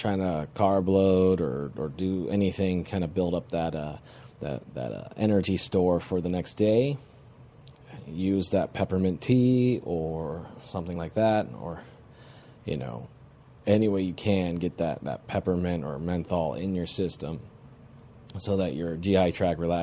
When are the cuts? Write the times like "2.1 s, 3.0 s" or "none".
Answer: none